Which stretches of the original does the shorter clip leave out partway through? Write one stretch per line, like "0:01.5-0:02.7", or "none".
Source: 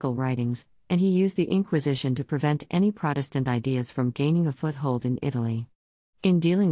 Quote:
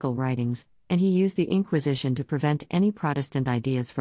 none